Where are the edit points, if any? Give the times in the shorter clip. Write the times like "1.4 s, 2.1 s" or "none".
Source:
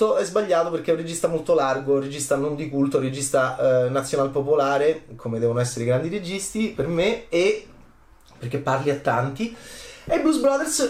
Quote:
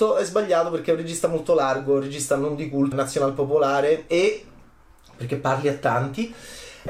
2.9 s, 4.1 s